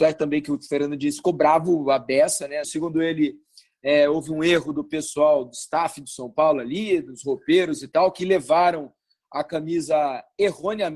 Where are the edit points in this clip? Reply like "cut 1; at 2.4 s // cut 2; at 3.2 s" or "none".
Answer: cut 1; at 2.6 s